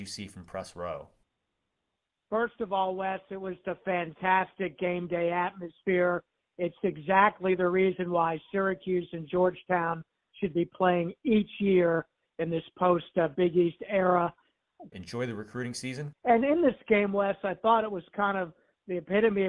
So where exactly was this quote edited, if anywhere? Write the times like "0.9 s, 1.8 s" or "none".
3.6 s, 14.9 s, 16.1 s